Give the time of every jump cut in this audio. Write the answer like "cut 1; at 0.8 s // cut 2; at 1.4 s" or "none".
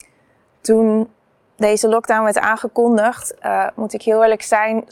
none